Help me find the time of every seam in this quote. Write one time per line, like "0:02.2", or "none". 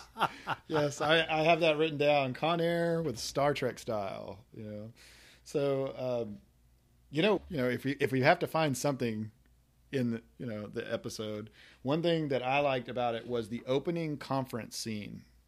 0:07.4